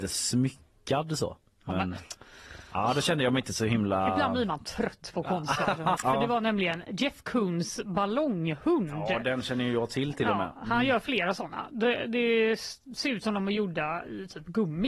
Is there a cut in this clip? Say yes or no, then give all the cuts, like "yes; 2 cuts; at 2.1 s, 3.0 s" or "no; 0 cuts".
yes; 1 cut; at 6.0 s